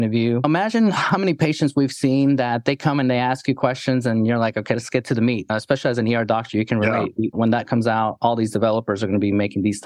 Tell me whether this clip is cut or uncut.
cut